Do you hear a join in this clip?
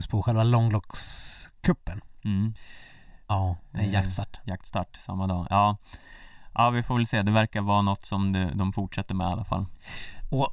yes; 1 cut; at 3.3 s

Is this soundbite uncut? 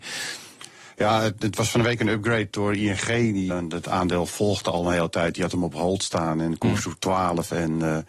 no; 1 cut; at 3.5 s

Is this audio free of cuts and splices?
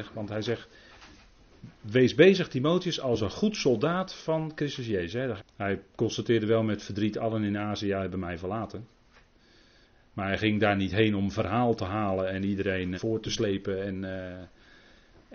no; 2 cuts; at 5.4 s, 12.9 s

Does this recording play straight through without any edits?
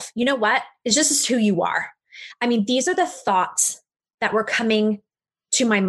yes; 0 cuts

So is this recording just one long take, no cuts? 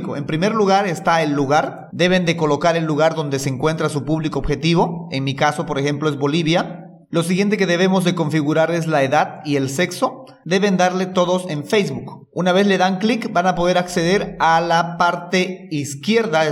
no; 1 cut; at 10.4 s

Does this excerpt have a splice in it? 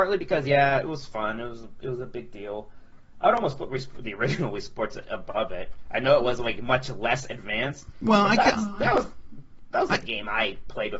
no; 0 cuts

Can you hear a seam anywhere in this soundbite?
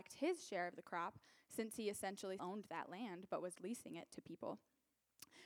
yes; 2 cuts; at 2.4 s, 3.6 s

